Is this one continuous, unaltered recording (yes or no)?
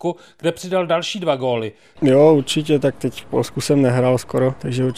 no